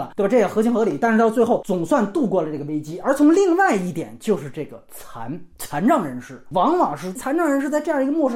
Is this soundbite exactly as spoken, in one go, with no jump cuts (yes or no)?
yes